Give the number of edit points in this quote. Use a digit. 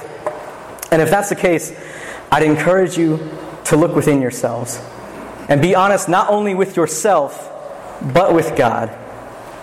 1